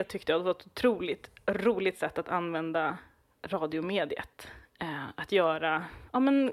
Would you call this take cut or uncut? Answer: uncut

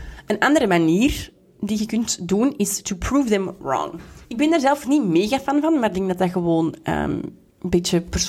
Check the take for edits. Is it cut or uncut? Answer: cut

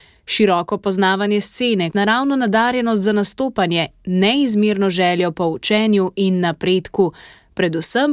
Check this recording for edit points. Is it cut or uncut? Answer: cut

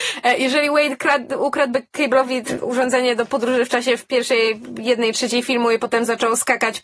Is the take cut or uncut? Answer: cut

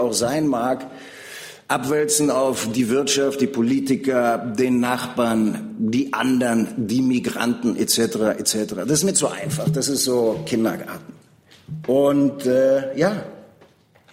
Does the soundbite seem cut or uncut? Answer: uncut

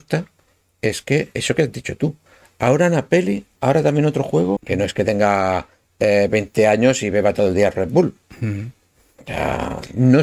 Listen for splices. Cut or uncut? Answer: cut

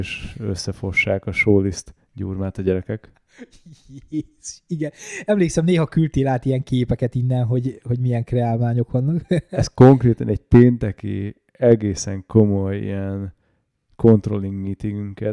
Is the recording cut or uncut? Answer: uncut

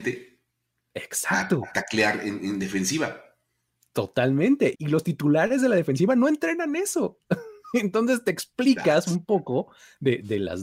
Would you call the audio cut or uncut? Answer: cut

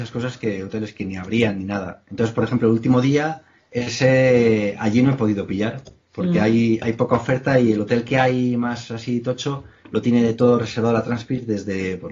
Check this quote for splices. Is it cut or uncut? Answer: cut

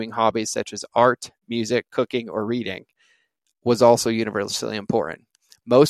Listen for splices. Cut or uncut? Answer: uncut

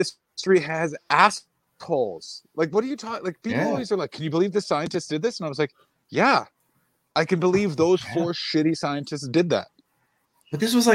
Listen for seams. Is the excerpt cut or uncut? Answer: uncut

